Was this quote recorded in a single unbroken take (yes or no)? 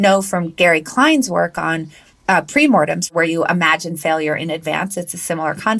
yes